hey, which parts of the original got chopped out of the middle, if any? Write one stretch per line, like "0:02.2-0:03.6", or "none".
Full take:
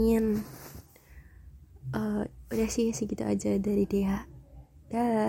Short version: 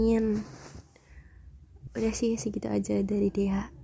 0:01.9-0:02.4